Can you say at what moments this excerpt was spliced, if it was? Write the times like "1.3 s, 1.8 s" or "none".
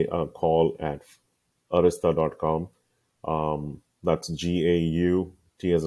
none